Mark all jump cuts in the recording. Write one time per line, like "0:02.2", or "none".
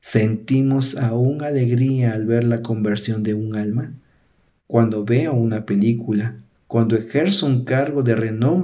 0:04.5
0:06.6